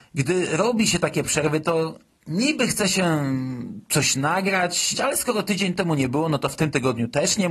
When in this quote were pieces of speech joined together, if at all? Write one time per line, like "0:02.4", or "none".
0:04.9